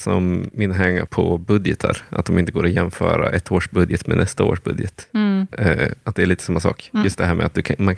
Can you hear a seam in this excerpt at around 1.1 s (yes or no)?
yes